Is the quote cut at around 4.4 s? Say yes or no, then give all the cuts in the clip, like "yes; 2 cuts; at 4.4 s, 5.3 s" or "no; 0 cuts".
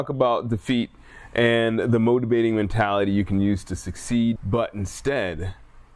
yes; 1 cut; at 4.4 s